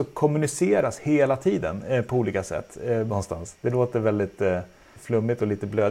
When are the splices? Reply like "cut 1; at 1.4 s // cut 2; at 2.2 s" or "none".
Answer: cut 1; at 3.1 s